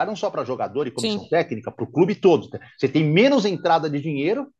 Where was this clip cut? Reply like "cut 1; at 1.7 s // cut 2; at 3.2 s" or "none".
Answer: none

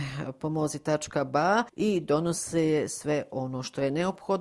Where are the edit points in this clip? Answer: none

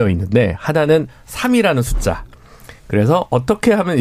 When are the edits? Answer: none

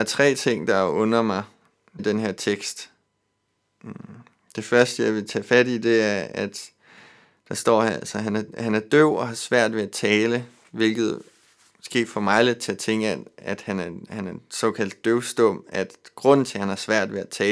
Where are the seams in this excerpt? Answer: cut 1; at 2.0 s // cut 2; at 13.4 s

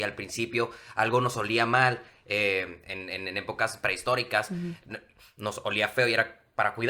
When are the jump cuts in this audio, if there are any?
none

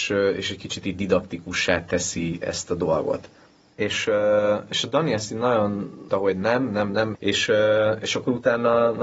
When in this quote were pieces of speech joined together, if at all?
cut 1; at 6.1 s // cut 2; at 7.1 s

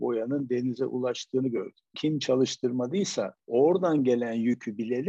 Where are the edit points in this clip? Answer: cut 1; at 1.9 s

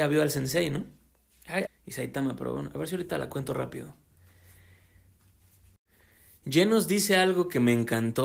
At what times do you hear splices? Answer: cut 1; at 1.7 s

